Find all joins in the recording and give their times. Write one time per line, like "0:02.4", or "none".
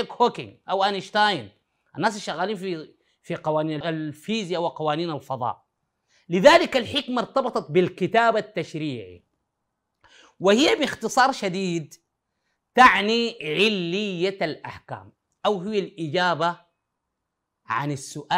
0:03.8